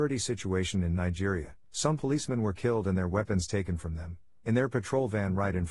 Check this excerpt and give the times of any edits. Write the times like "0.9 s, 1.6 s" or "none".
1.6 s